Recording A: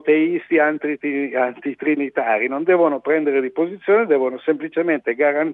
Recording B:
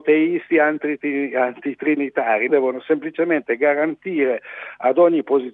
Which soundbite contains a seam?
B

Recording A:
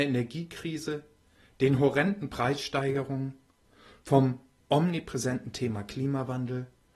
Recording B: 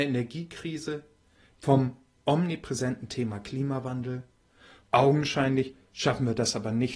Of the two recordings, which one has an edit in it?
B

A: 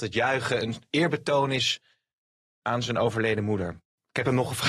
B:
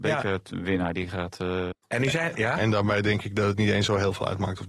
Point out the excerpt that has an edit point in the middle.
B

